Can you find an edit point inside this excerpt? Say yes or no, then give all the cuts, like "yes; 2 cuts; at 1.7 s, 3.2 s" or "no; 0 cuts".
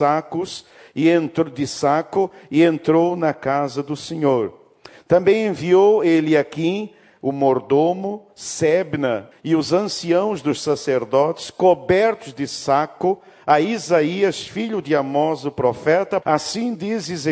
yes; 2 cuts; at 9.3 s, 16.2 s